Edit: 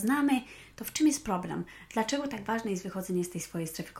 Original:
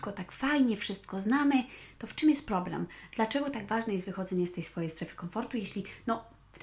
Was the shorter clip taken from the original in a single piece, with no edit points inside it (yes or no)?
yes